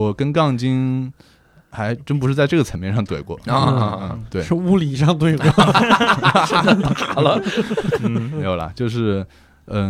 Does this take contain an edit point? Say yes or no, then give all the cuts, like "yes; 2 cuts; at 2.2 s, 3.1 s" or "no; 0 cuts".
yes; 1 cut; at 8.0 s